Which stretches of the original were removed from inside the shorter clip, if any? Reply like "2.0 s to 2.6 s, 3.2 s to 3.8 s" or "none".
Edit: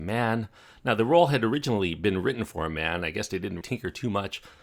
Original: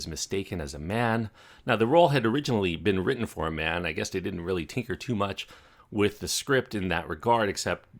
4.4 s to 4.7 s